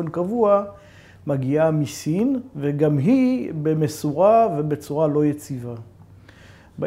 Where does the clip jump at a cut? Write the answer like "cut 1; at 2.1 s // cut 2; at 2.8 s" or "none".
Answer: none